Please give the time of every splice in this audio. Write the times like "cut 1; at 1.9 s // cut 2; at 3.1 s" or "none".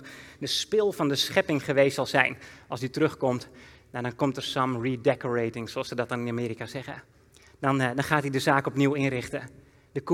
none